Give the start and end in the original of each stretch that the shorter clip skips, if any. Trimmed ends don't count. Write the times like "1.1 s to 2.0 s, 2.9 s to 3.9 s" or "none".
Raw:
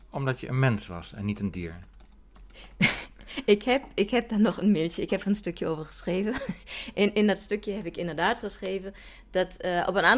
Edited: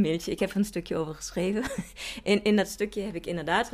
none